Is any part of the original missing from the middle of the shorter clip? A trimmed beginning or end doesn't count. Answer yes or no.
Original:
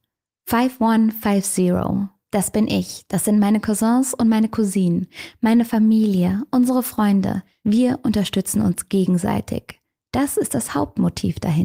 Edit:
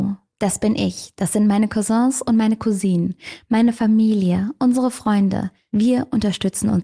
no